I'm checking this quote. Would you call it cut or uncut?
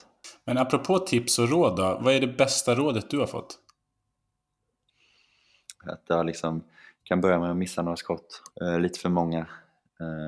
cut